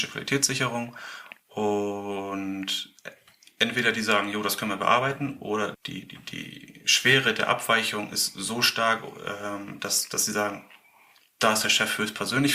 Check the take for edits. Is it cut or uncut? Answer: cut